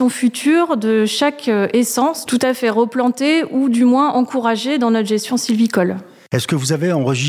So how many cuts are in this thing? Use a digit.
1